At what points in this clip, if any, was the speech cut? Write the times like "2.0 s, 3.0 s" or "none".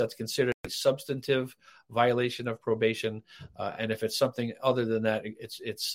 none